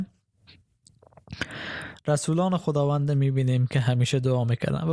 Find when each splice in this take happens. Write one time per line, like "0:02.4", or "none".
none